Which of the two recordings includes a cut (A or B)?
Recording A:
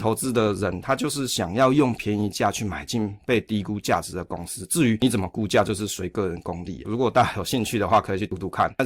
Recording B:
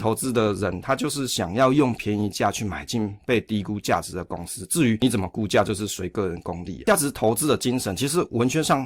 A